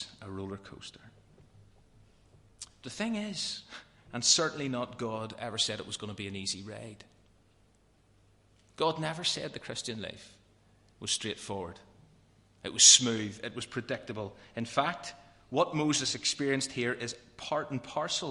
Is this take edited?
yes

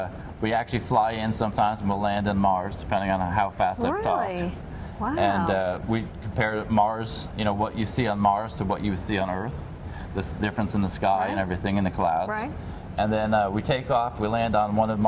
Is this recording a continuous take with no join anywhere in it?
yes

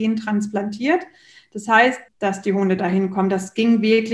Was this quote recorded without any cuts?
no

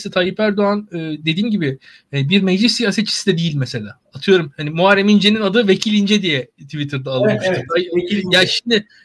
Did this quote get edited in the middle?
no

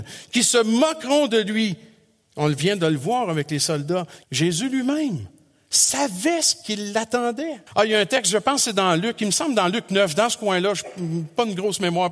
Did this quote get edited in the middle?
yes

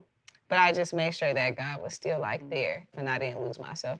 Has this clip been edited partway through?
yes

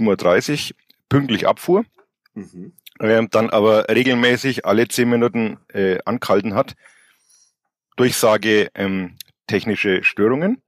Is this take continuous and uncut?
yes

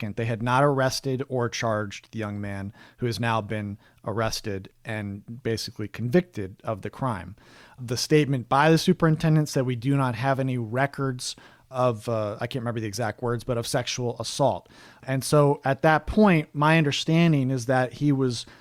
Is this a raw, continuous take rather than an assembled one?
yes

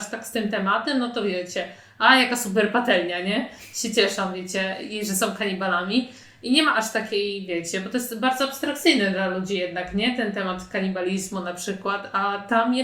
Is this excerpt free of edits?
yes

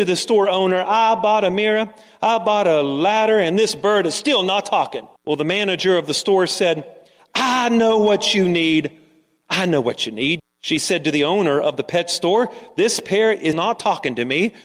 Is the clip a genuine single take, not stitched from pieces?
no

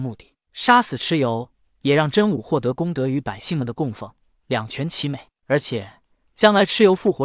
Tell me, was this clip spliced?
no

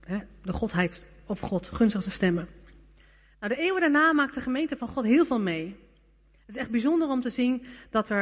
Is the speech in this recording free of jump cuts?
yes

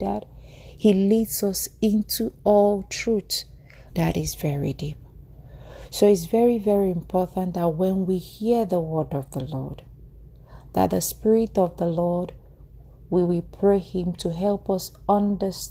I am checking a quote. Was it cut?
yes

